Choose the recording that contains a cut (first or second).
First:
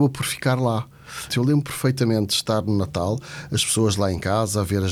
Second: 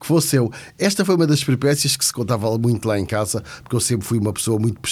first